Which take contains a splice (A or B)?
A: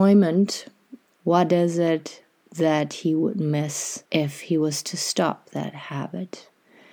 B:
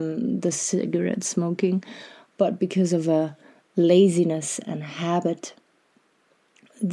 A